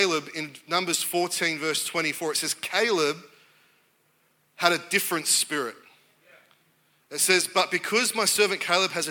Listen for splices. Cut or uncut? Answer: uncut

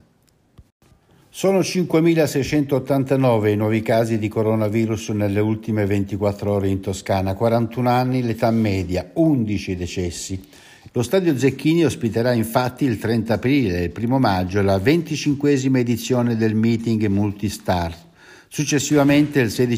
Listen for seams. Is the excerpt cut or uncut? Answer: cut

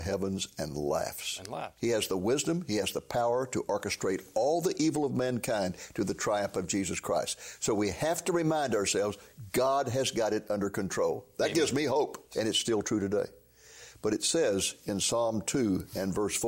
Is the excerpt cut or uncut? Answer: cut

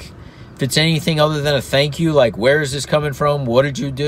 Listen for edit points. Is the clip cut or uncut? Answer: uncut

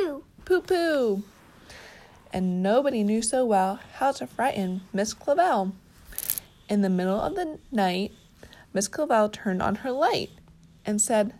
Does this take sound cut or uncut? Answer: uncut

